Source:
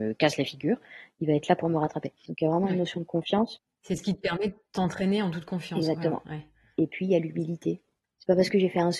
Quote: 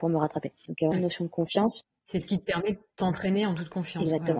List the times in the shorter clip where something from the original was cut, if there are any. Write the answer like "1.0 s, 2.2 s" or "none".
0.9 s